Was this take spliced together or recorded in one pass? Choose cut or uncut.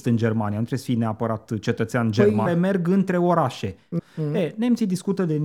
cut